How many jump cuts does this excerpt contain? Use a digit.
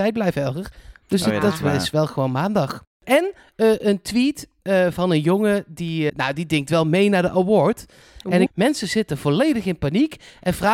2